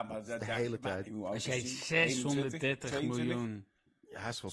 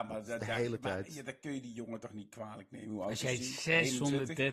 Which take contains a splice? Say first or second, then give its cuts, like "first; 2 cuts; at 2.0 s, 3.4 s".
first; 1 cut; at 1.1 s